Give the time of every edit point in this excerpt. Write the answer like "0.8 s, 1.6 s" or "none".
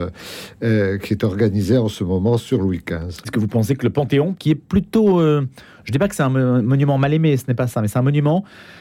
3.2 s, 4.3 s